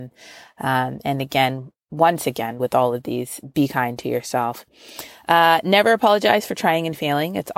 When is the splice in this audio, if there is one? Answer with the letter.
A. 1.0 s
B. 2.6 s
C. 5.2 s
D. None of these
D